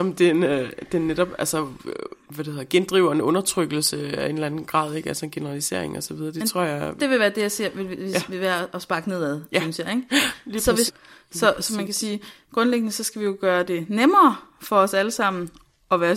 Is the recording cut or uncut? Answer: cut